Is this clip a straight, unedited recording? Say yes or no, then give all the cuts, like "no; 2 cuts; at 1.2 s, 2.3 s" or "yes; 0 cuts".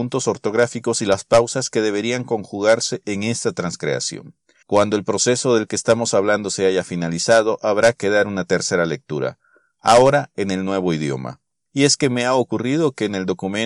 no; 2 cuts; at 4.6 s, 11.7 s